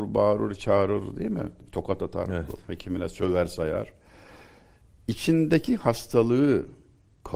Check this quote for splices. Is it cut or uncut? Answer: uncut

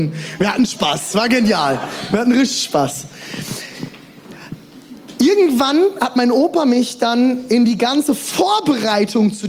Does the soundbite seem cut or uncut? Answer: uncut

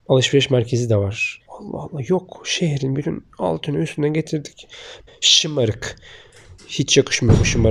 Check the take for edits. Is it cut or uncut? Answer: cut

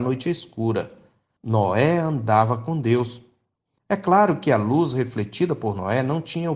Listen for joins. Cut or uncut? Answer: cut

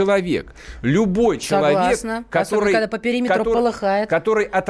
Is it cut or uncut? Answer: uncut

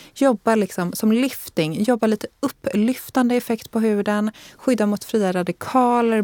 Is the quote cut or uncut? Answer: uncut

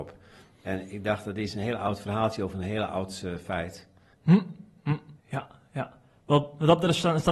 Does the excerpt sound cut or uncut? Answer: cut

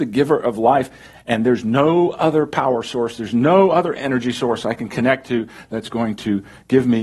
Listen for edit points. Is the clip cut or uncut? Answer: uncut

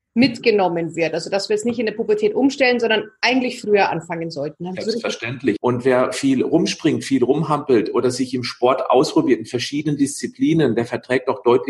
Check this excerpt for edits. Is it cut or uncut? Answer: cut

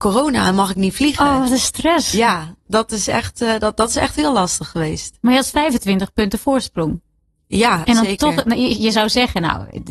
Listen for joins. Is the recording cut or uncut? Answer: uncut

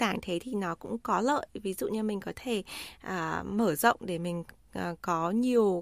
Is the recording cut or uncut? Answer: uncut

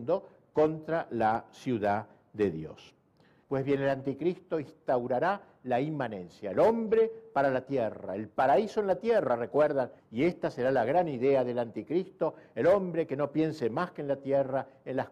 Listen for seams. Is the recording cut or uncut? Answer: cut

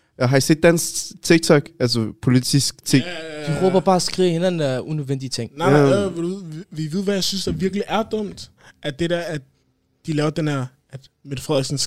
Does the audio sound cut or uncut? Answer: uncut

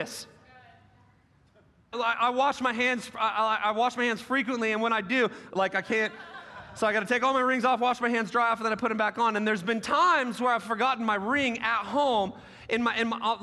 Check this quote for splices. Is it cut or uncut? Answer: cut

